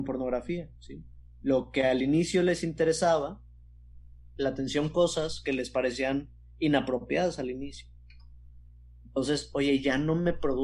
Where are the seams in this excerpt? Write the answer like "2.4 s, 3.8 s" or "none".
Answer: 4.4 s